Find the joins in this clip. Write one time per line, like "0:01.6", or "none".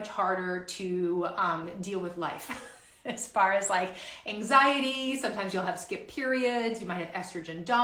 none